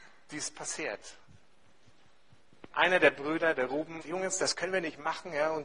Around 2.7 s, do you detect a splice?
yes; 2 cuts; at 2.7 s, 4.0 s

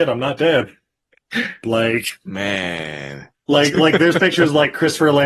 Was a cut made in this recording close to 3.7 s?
no; 1 cut; at 1.6 s

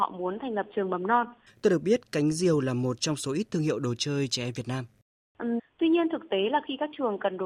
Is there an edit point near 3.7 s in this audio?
no; 2 cuts; at 1.5 s, 5.6 s

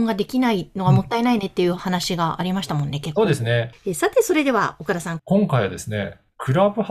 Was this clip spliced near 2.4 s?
no; 2 cuts; at 3.7 s, 5.2 s

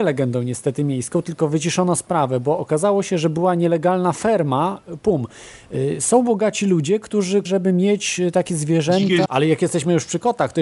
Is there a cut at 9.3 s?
yes; 2 cuts; at 7.5 s, 9.3 s

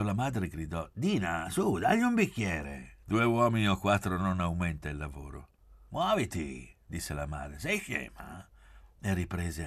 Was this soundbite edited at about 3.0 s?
yes; 2 cuts; at 3.0 s, 5.9 s

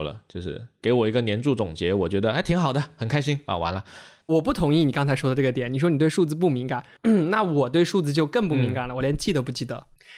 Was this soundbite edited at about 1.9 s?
no; 2 cuts; at 4.2 s, 7.0 s

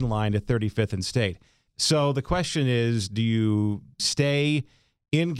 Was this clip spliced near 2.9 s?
no; 1 cut; at 1.7 s

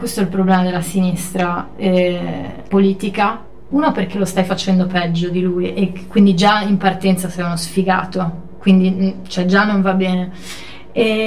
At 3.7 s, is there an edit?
yes; 2 cuts; at 2.7 s, 3.7 s

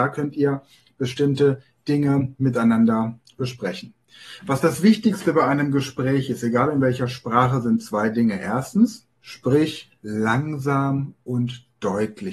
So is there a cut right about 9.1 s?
yes; 1 cut; at 9.1 s

